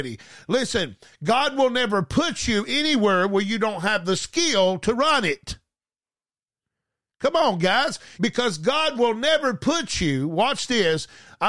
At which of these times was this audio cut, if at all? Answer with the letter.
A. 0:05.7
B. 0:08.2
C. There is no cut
B